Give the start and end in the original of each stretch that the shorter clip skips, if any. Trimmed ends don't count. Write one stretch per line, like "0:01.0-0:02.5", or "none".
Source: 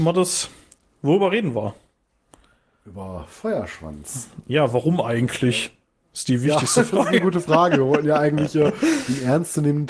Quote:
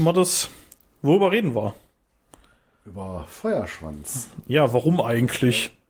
none